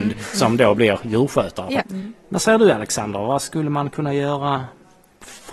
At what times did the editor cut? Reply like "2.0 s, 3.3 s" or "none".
1.8 s